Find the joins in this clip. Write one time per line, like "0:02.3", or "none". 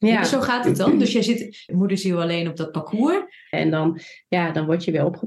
0:01.7
0:03.5